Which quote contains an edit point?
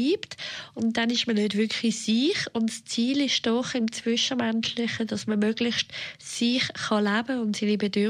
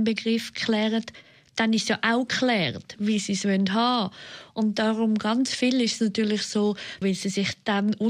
second; 2 cuts; at 3.0 s, 7.0 s

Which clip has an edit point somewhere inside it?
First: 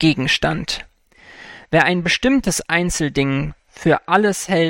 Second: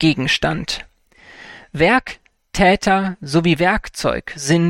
first; 1 cut; at 1.6 s

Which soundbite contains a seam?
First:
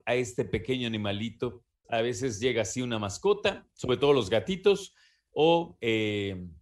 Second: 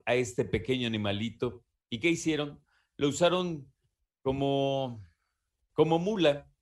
first; 1 cut; at 1.8 s

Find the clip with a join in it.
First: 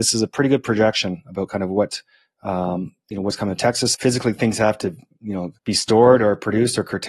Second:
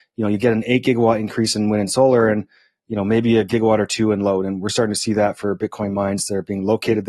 first; 2 cuts; at 3.9 s, 5.6 s

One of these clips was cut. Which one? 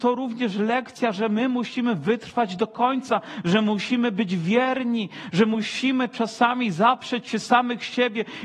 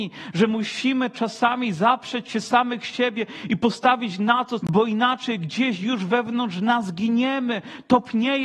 second; 1 cut; at 4.6 s

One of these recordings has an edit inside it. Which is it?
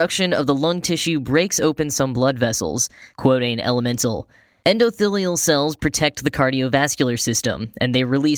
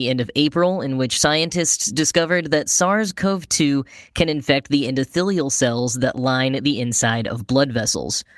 first; 1 cut; at 3.1 s

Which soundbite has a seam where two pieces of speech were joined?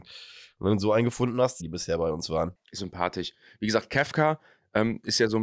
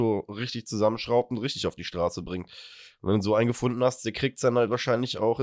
first; 2 cuts; at 1.6 s, 2.8 s

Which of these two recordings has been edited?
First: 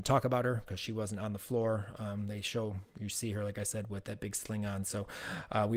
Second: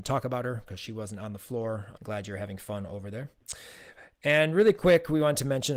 second; 1 cut; at 2.0 s

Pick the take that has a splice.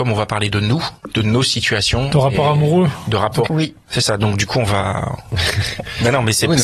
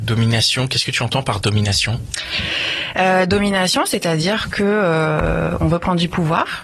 first; 1 cut; at 3.5 s

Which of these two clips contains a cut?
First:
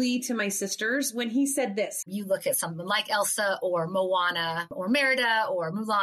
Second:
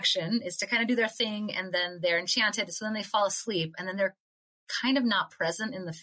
first; 1 cut; at 2.0 s

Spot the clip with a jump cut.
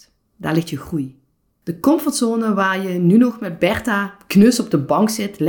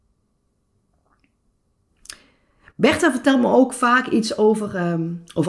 first; 1 cut; at 1.6 s

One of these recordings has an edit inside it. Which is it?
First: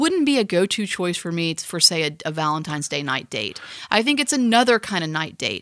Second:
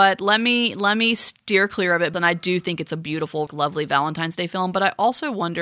second; 2 cuts; at 2.1 s, 3.5 s

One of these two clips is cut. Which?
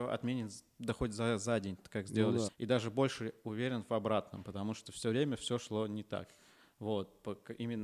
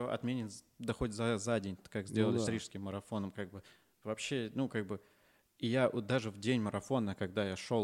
first; 1 cut; at 2.5 s

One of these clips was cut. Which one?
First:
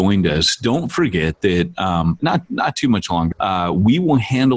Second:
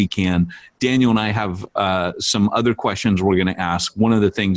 first; 2 cuts; at 2.2 s, 3.3 s

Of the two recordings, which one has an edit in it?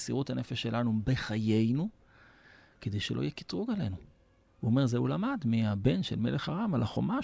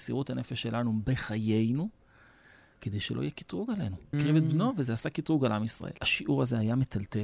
second; 2 cuts; at 4.1 s, 6.0 s

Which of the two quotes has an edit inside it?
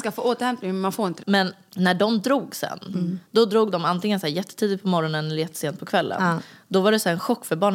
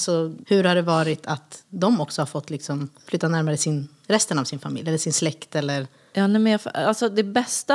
first; 1 cut; at 1.2 s

